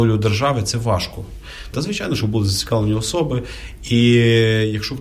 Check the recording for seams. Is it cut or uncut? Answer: cut